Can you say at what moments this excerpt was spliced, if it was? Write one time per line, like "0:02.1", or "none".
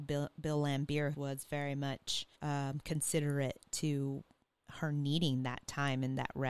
0:01.1
0:02.3